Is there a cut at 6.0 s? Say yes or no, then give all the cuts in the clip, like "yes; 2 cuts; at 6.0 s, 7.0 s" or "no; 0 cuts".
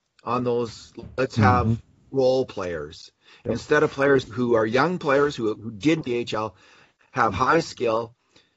yes; 2 cuts; at 4.2 s, 6.0 s